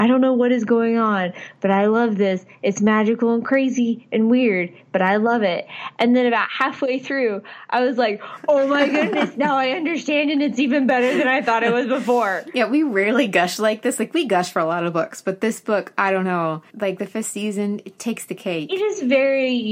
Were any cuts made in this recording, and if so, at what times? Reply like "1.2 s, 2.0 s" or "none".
16.7 s, 18.0 s